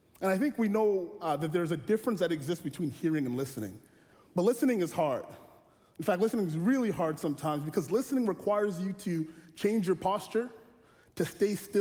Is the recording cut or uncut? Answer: cut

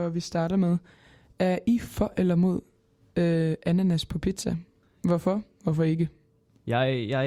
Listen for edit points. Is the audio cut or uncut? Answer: uncut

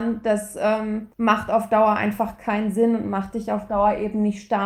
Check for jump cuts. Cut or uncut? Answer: cut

